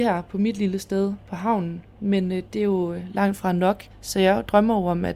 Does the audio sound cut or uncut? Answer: uncut